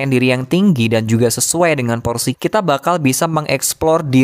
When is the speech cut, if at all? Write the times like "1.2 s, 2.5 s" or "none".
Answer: 2.3 s